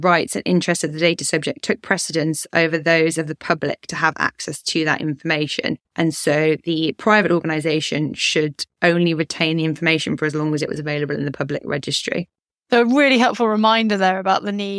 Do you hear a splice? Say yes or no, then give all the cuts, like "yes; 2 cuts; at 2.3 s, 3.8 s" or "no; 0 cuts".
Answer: yes; 1 cut; at 5.8 s